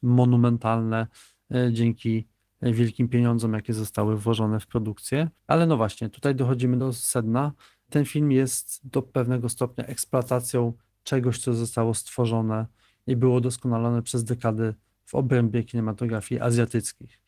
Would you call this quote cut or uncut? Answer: cut